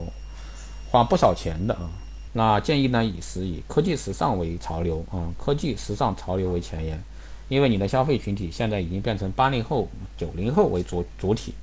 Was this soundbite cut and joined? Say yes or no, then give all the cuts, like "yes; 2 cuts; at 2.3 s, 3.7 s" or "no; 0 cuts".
yes; 1 cut; at 2.3 s